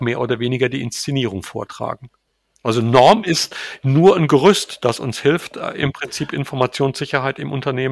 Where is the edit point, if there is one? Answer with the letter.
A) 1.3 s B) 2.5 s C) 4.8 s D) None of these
B